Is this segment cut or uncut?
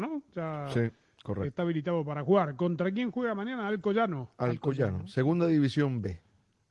uncut